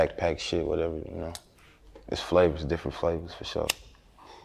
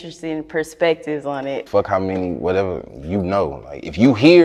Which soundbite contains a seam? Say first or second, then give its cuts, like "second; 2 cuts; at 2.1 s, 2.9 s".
second; 1 cut; at 1.7 s